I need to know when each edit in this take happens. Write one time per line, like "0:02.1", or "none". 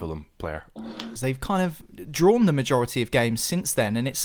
0:01.2